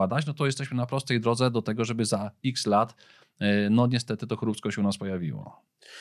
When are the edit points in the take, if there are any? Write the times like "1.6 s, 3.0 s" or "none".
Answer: none